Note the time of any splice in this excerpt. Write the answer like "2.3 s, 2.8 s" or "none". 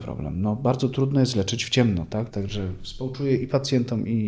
2.3 s